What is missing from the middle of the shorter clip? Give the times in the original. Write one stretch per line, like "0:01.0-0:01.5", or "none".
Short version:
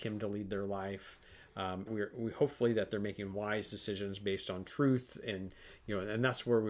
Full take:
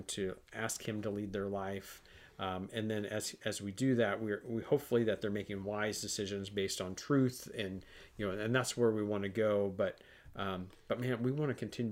0:02.7-0:04.2